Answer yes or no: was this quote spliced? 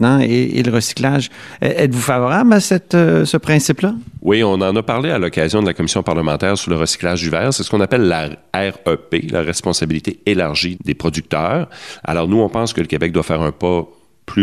yes